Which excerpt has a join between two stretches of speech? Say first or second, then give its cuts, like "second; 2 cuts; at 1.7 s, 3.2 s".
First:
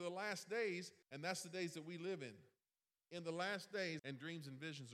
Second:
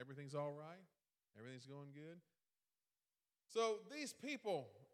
first; 2 cuts; at 1.0 s, 4.0 s